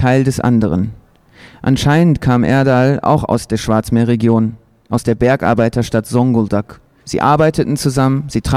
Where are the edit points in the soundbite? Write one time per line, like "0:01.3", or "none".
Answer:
0:07.0